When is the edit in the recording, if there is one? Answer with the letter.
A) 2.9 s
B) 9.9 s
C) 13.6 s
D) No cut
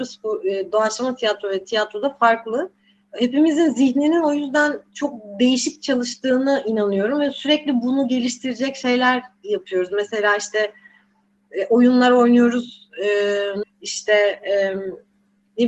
C